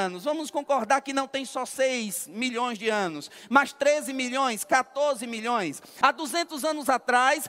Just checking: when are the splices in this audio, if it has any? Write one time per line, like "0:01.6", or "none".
0:06.0